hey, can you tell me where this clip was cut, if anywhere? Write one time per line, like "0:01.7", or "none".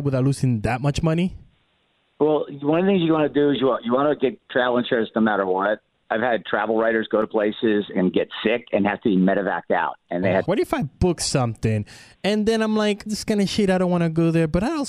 0:10.5
0:13.1